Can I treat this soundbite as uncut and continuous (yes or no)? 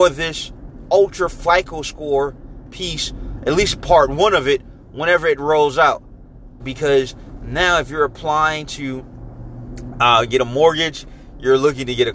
no